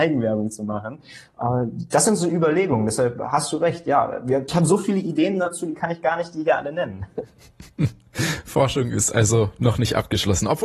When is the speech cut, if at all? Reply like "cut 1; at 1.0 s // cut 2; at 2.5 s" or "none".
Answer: cut 1; at 4.5 s